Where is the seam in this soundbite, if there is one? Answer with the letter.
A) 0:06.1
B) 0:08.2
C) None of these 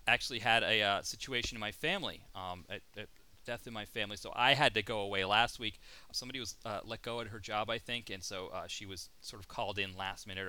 A